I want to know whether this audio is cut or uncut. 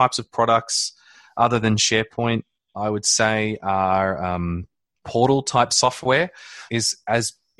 cut